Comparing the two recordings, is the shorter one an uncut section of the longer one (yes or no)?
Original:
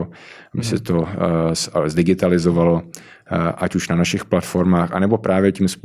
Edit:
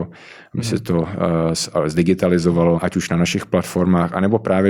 no